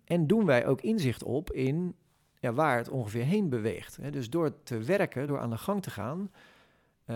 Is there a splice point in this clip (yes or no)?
no